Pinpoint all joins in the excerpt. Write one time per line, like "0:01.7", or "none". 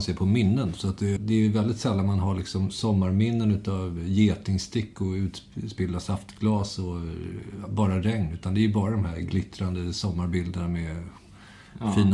0:01.2

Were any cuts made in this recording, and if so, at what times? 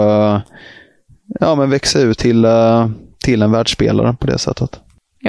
none

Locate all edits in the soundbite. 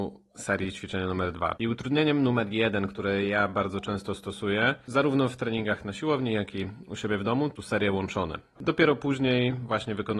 0:01.6
0:08.6

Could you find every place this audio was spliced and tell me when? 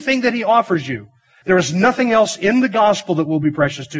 0:01.4

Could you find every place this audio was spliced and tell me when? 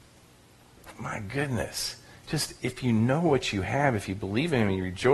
0:00.9

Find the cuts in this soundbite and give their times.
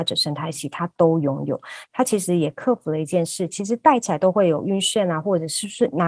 0:01.9
0:03.5

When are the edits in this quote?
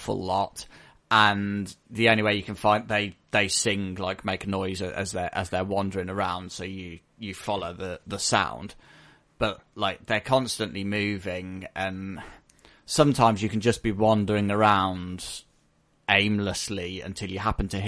none

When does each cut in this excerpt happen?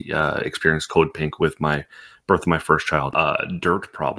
0:03.1

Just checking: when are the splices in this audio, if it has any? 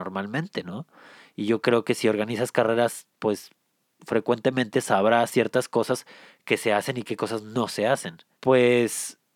0:08.3

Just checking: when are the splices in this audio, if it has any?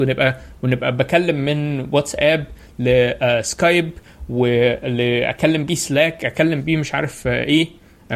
none

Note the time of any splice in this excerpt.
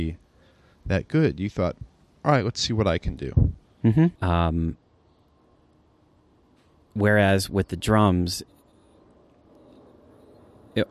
0:04.1

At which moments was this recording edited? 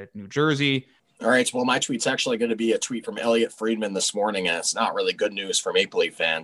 0:01.0

